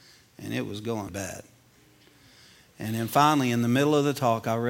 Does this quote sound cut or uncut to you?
cut